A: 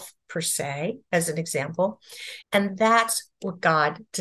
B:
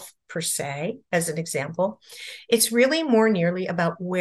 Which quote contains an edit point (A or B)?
A